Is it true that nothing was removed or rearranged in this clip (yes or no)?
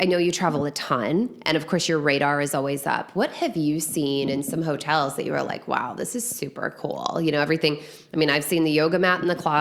yes